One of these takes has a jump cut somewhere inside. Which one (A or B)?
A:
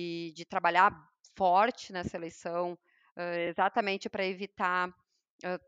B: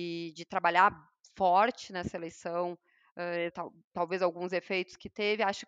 B